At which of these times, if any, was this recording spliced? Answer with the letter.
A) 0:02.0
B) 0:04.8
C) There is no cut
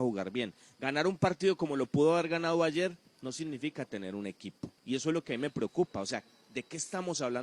B